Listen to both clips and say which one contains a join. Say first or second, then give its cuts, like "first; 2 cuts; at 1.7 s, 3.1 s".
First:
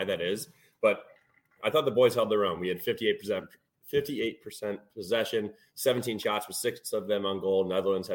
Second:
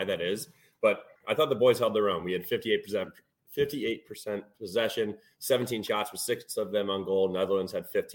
second; 1 cut; at 1.2 s